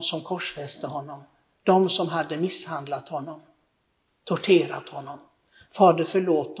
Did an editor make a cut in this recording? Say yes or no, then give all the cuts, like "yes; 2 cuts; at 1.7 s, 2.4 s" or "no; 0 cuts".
no; 0 cuts